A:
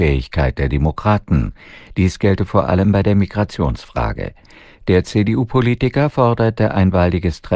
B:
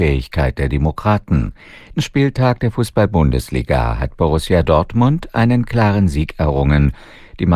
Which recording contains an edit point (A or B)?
B